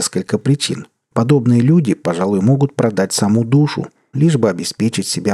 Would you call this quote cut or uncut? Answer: cut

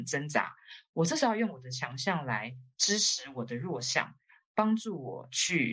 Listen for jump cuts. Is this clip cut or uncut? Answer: uncut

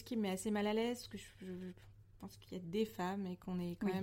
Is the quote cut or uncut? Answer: uncut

